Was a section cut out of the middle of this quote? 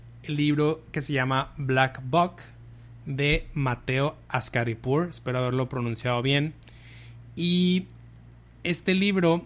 no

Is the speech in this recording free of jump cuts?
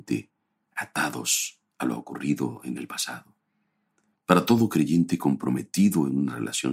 no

